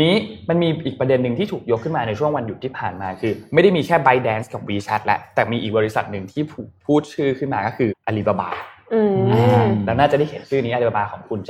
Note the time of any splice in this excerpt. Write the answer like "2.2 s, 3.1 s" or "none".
7.9 s